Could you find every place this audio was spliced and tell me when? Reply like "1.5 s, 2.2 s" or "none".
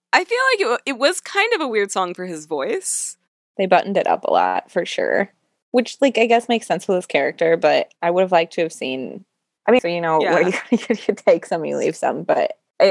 9.8 s